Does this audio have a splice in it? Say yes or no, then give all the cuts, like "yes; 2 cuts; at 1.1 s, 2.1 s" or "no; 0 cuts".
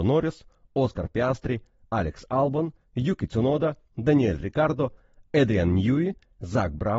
no; 0 cuts